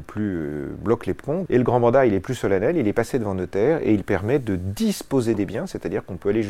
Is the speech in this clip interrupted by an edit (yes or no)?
yes